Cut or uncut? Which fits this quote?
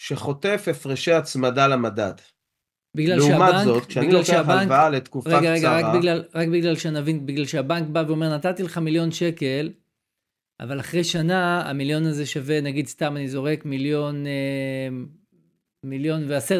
uncut